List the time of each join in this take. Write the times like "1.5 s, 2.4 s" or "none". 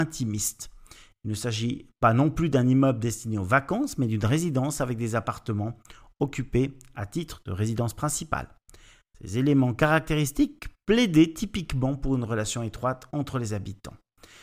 none